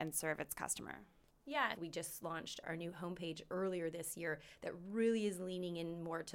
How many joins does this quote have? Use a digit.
1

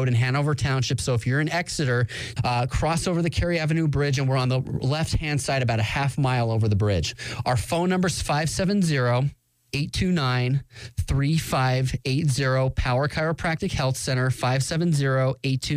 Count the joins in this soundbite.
1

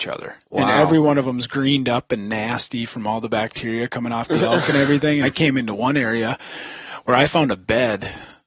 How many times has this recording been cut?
1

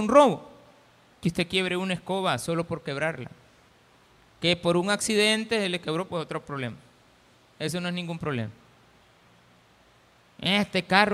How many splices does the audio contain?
1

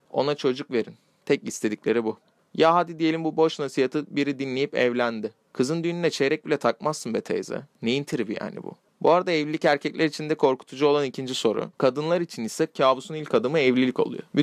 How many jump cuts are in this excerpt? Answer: 1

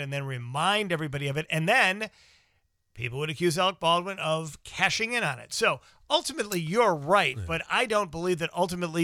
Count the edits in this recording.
0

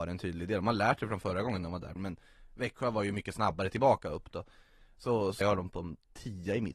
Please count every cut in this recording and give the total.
2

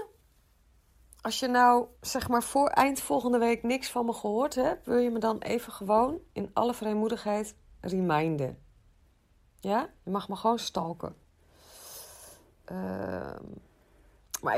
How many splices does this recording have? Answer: 2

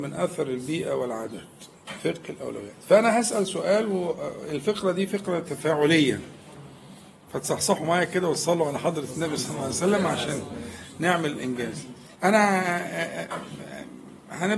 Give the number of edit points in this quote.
1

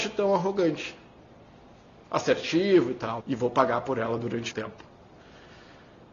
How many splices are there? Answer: 2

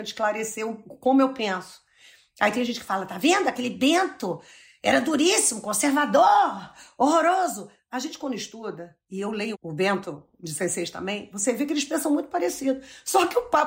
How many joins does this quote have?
1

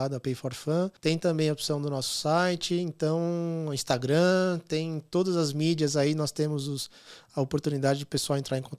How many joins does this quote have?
1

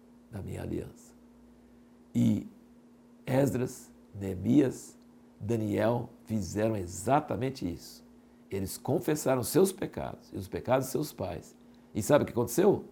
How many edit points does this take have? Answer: 0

